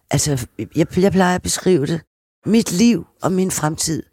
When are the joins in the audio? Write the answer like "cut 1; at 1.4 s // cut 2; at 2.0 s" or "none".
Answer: none

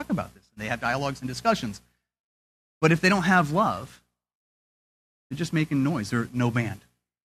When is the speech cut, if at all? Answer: cut 1; at 6.3 s

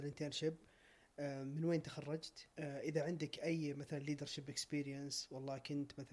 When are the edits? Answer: cut 1; at 2.5 s

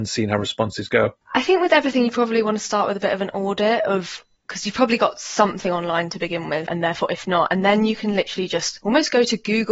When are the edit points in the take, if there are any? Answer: cut 1; at 6.7 s

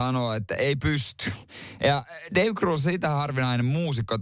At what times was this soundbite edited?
cut 1; at 1.8 s

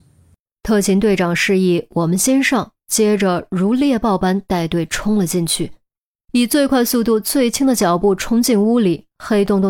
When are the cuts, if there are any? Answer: cut 1; at 6.2 s

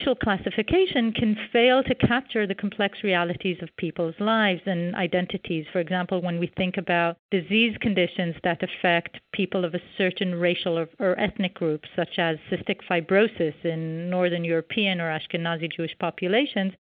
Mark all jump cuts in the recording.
none

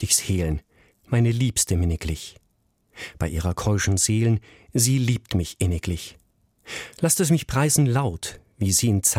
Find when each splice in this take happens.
none

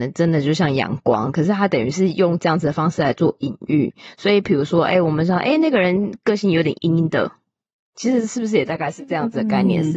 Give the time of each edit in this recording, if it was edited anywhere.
cut 1; at 6.8 s

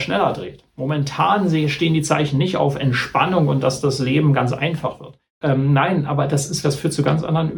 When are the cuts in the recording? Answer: cut 1; at 5.4 s // cut 2; at 6.6 s

